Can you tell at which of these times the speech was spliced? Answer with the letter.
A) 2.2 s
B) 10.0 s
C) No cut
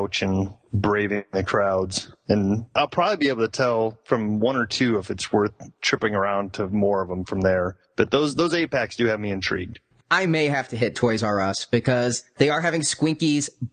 C